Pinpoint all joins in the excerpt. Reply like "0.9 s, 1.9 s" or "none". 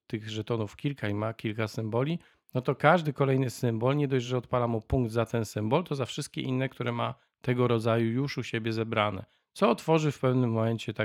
none